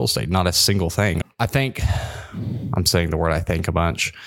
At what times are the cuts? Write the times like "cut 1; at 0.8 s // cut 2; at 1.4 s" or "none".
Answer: cut 1; at 1.2 s